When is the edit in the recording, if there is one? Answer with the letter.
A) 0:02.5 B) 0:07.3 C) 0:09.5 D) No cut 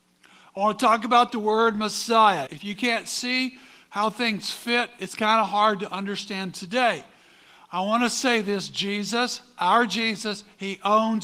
A